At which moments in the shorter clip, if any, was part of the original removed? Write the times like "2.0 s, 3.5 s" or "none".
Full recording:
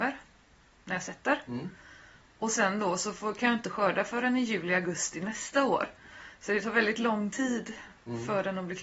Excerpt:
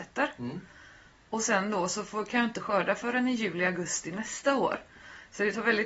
none